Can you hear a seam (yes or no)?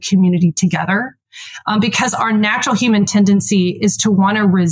no